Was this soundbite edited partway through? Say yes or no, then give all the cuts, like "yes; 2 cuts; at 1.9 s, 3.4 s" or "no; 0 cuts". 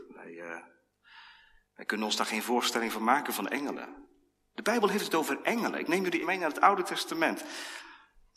yes; 1 cut; at 6.2 s